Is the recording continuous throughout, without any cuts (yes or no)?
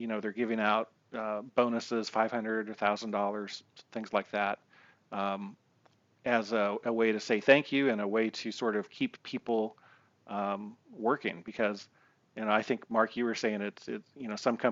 yes